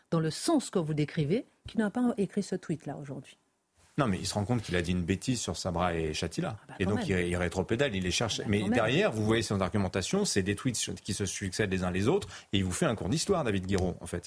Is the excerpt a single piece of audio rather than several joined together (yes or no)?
yes